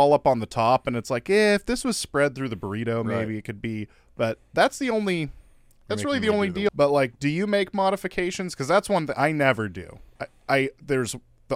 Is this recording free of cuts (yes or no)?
no